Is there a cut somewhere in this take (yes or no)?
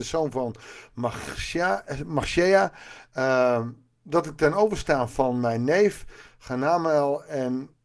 no